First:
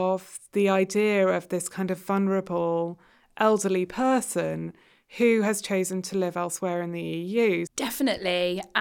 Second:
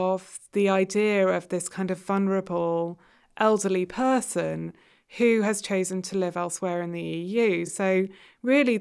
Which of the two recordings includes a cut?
first; 1 cut; at 7.7 s

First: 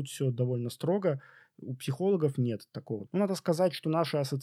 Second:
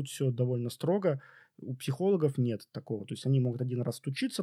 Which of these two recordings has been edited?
first; 1 cut; at 3.1 s

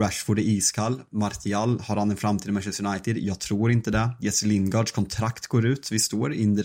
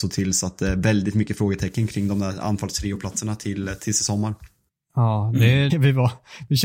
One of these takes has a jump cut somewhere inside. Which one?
second; 1 cut; at 5.7 s

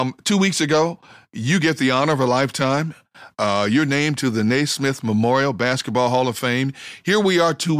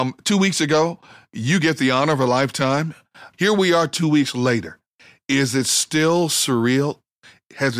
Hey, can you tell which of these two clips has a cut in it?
second; 1 cut; at 3.3 s

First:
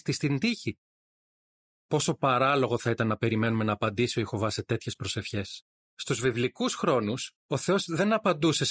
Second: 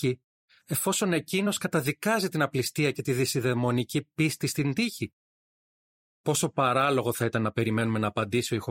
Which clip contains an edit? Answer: first; 2 cuts; at 5.7 s, 7.4 s

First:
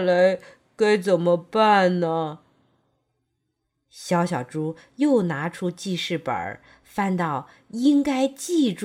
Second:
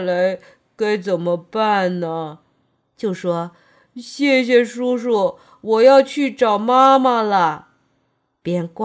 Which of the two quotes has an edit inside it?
second; 1 cut; at 2.9 s

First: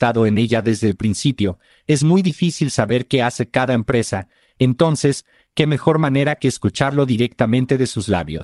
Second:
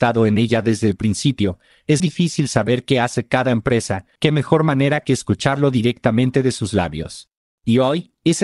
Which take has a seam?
second; 2 cuts; at 2.0 s, 4.2 s

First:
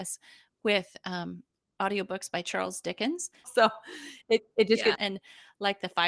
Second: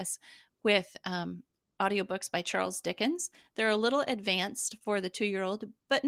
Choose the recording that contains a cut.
first; 2 cuts; at 3.4 s, 5.0 s

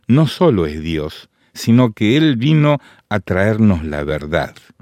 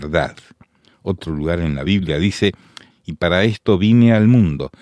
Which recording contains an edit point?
second; 1 cut; at 2.9 s

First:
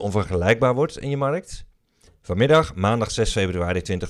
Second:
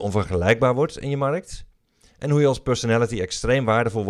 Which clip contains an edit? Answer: first; 1 cut; at 2.1 s

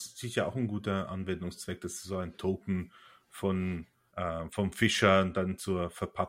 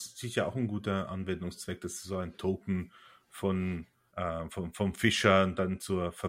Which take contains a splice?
first; 1 cut; at 4.5 s

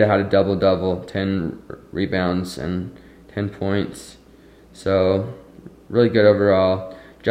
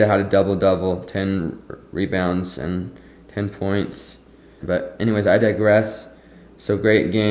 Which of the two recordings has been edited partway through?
second; 1 cut; at 4.6 s

